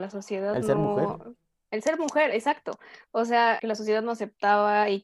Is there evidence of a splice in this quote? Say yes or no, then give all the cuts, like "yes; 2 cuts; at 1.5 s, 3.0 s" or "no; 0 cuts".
yes; 1 cut; at 3.6 s